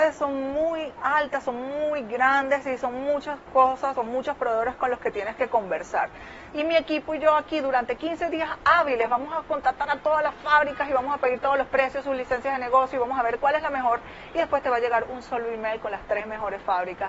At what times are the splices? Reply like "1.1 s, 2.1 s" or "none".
6.5 s